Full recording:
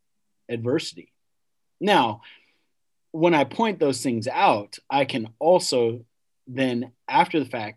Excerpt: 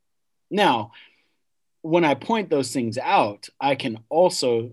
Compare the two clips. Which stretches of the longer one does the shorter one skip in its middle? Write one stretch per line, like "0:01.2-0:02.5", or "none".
none